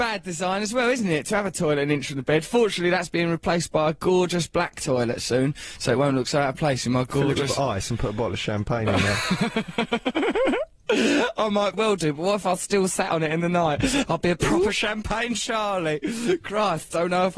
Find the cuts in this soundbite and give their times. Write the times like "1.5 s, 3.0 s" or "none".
11.7 s